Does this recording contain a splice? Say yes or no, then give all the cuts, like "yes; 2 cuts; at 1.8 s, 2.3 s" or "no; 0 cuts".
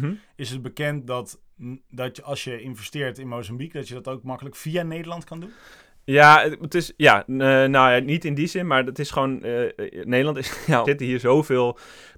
yes; 1 cut; at 10.8 s